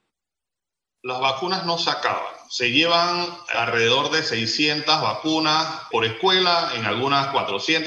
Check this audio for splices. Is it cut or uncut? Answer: cut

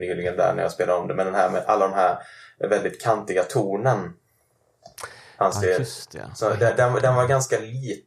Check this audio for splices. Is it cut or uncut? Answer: uncut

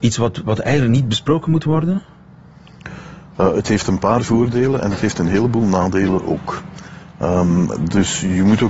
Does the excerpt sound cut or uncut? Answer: uncut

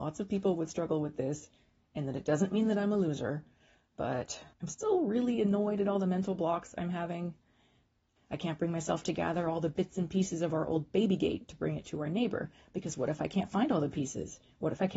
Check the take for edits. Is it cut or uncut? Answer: cut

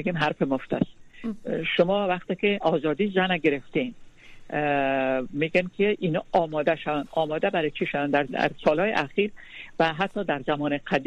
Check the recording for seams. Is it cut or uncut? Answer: cut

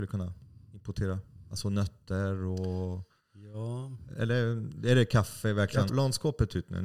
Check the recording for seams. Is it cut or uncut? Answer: cut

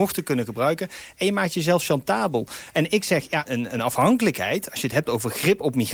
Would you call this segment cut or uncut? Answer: cut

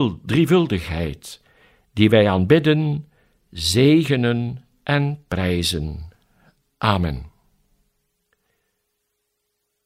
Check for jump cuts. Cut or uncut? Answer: uncut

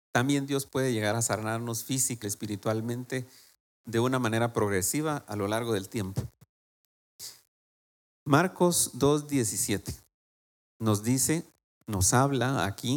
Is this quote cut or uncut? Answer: cut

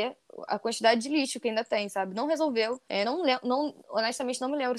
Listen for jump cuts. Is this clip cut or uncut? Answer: uncut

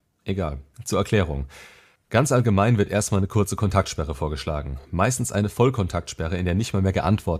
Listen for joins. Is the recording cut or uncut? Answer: uncut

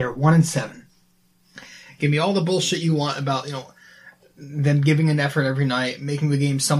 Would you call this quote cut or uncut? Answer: uncut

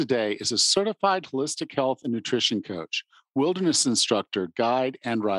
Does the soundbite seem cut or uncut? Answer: uncut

